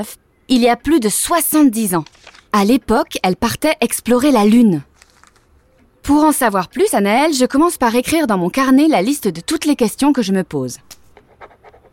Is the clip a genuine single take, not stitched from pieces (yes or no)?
yes